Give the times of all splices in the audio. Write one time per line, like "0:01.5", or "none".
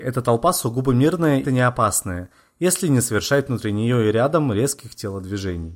0:01.4